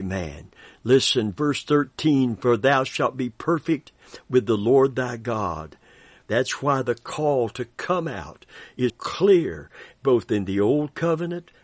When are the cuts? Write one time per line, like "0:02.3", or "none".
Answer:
0:06.3
0:08.9